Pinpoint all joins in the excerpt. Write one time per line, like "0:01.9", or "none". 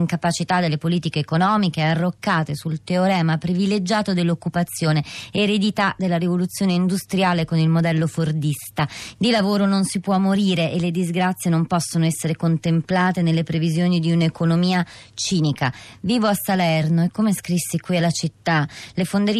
0:09.1